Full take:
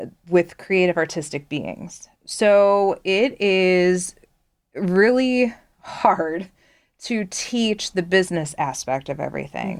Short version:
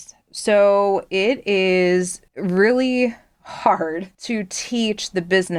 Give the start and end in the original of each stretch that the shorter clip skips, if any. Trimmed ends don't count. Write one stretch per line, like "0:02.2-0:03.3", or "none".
0:04.2-0:04.7
0:06.5-0:07.0